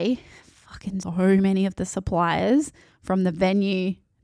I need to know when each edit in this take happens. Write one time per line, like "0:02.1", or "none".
0:01.0